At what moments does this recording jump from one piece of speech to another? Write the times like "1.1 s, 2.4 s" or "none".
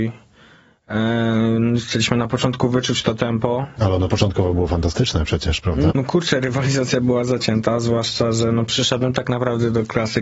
5.9 s